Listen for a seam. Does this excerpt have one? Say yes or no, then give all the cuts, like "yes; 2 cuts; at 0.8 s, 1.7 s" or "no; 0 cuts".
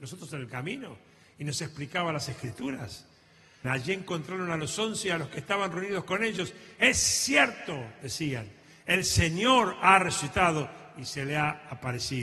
yes; 1 cut; at 3.6 s